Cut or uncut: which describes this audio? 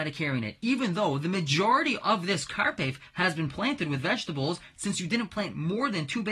cut